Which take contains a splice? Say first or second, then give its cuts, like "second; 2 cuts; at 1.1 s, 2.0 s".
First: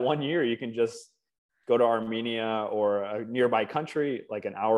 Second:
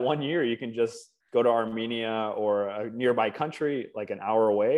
second; 1 cut; at 1.2 s